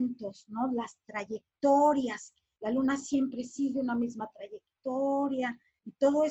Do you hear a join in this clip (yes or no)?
no